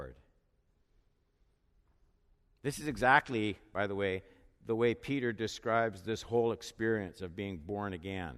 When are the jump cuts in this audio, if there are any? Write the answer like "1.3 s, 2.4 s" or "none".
none